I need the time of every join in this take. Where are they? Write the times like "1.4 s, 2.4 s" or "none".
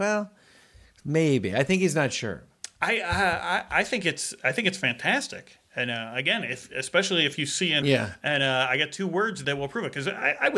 7.8 s, 9.4 s